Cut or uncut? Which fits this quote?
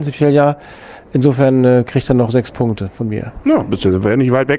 uncut